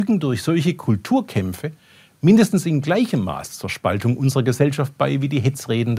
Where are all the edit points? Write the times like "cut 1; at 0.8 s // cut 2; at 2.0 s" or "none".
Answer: none